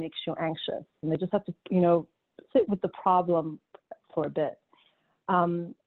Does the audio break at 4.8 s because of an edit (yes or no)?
no